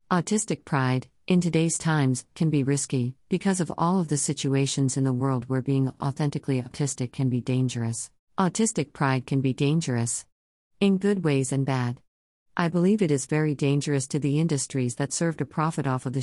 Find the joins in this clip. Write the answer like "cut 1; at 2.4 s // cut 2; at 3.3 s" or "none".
cut 1; at 8.2 s